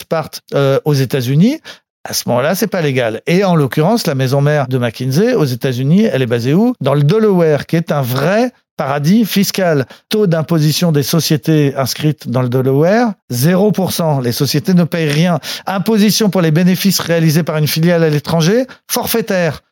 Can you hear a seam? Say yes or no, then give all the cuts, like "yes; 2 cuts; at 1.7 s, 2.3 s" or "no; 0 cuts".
yes; 1 cut; at 13.2 s